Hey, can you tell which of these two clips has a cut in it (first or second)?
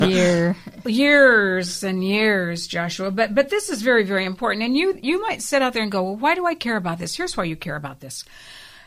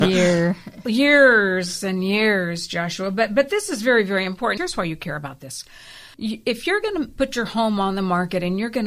second